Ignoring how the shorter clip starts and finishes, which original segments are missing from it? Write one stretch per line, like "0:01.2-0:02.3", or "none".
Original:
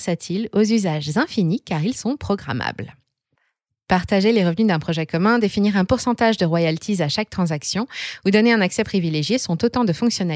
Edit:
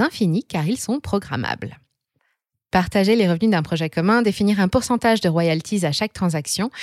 none